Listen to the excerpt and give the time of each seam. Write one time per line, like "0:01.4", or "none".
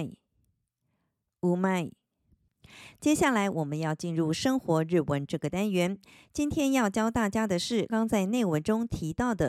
0:07.9